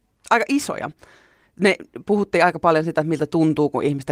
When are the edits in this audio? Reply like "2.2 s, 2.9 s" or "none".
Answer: none